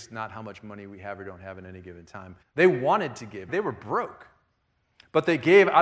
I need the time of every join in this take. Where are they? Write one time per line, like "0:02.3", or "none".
0:02.4
0:03.5